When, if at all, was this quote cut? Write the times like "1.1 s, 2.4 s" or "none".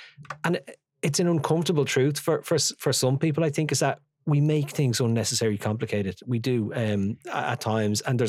none

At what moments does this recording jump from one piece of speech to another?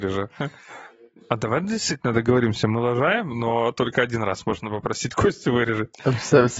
none

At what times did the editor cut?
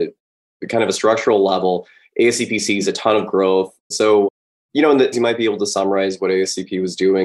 3.9 s, 5.1 s

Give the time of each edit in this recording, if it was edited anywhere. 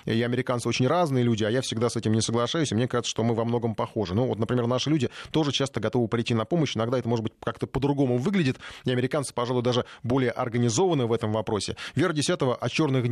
none

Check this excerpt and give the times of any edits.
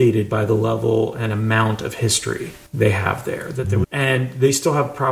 2.7 s, 3.8 s

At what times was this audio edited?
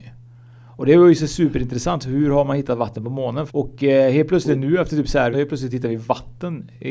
3.5 s, 5.3 s

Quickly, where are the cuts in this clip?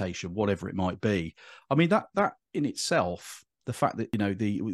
3.6 s

